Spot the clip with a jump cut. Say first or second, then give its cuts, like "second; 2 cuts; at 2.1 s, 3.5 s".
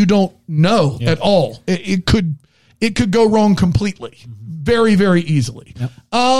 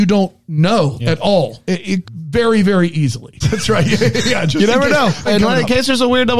second; 3 cuts; at 2.0 s, 3.4 s, 5.3 s